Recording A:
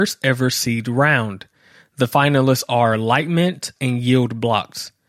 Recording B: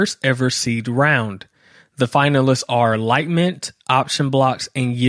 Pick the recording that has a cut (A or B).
A